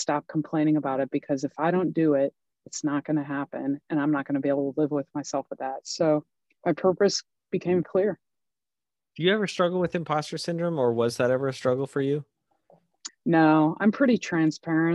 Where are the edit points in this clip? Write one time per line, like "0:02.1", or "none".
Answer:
0:07.8
0:13.1